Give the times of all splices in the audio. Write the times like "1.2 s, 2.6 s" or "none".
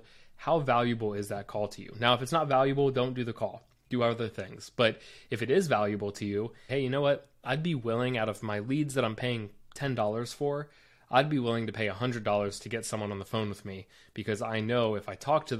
6.7 s